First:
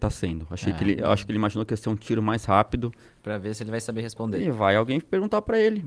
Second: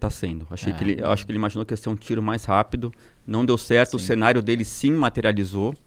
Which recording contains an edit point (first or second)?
first